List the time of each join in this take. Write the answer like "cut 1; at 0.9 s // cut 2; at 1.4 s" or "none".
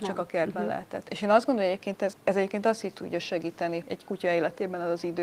cut 1; at 2.1 s // cut 2; at 3.8 s